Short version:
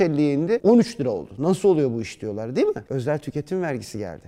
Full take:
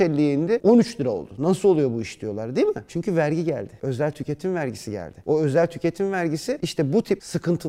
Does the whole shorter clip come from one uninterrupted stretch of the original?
no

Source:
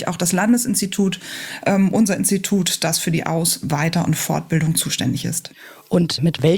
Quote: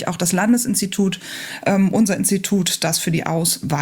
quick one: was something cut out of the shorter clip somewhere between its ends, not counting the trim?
no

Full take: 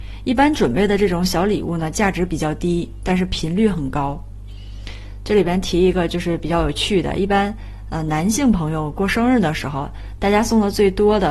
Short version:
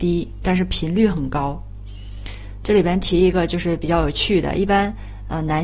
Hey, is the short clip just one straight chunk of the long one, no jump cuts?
yes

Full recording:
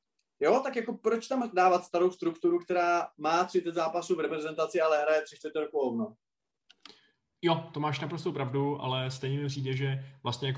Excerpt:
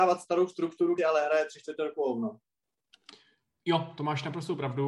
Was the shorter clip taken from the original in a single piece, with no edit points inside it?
no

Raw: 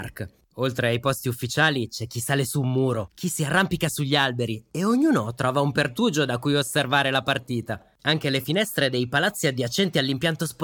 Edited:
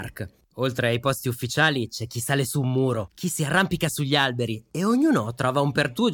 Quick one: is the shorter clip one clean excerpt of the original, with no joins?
yes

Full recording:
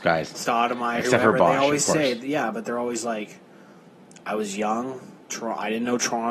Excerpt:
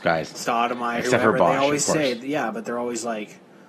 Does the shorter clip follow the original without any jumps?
yes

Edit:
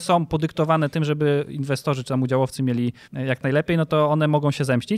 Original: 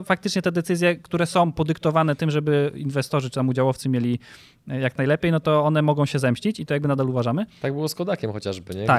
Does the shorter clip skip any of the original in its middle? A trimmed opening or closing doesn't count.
yes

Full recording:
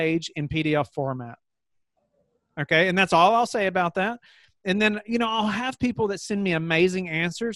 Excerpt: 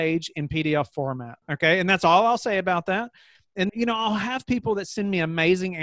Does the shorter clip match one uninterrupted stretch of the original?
no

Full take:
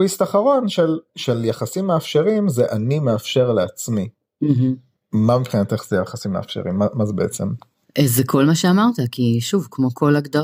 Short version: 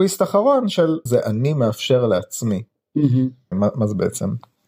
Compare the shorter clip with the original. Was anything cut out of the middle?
yes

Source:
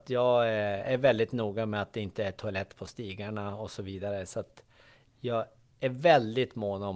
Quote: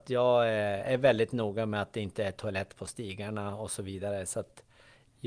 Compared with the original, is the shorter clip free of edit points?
yes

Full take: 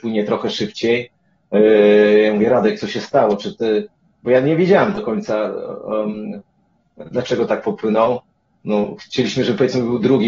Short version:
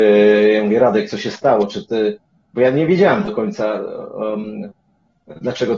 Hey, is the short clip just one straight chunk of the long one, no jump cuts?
yes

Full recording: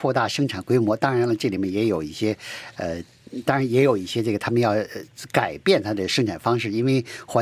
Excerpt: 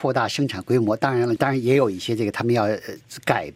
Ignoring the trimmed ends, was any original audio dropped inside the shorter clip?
yes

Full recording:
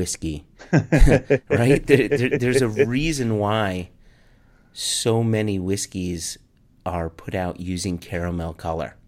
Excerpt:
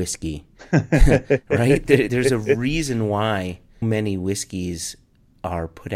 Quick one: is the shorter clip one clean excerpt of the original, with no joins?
no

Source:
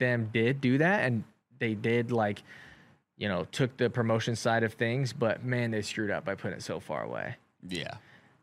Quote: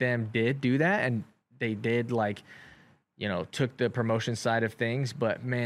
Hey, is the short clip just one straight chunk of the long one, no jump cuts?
yes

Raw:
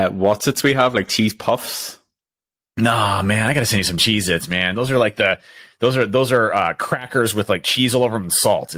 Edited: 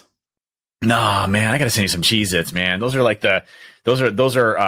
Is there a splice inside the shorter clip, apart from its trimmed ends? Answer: no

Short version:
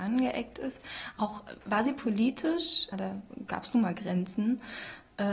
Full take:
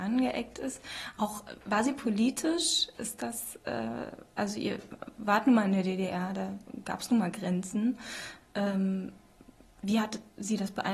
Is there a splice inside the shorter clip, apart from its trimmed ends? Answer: yes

